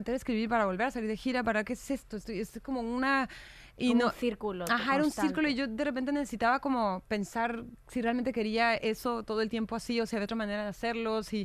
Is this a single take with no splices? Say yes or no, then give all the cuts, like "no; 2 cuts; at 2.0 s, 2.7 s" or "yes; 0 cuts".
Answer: yes; 0 cuts